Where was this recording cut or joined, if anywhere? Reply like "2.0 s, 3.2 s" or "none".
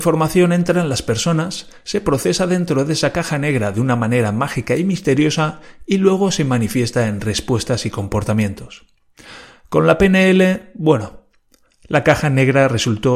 none